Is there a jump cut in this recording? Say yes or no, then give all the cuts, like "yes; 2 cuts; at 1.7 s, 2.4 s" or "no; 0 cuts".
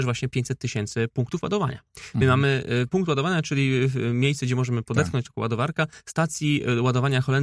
no; 0 cuts